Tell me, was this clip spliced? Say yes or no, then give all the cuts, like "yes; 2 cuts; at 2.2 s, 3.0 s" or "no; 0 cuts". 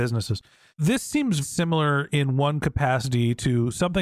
yes; 1 cut; at 1.4 s